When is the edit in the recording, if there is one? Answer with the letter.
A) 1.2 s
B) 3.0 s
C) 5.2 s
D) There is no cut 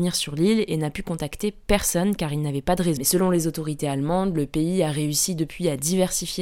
B